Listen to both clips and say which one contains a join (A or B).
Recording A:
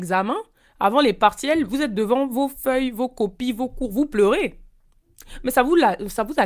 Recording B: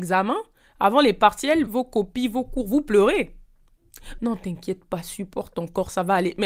B